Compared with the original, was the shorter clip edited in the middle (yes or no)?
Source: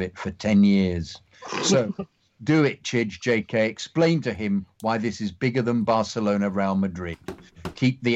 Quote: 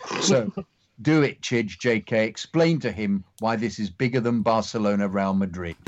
no